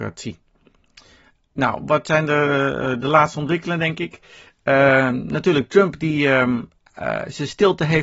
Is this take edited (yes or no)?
no